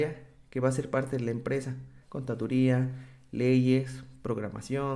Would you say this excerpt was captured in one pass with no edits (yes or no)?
no